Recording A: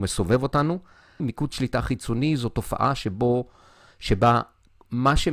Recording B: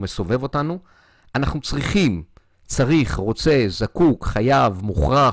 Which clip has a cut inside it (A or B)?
A